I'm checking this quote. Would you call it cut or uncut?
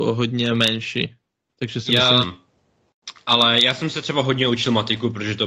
cut